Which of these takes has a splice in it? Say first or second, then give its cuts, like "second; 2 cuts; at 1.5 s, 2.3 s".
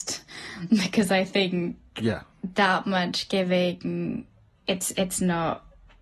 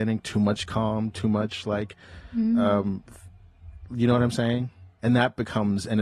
second; 1 cut; at 5.0 s